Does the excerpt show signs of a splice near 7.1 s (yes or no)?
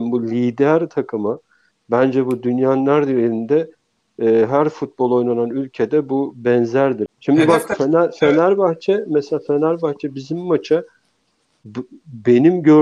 yes